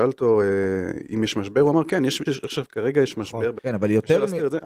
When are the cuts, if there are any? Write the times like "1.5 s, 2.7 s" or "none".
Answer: 2.3 s, 3.6 s